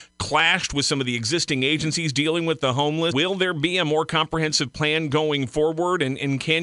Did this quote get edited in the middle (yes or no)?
yes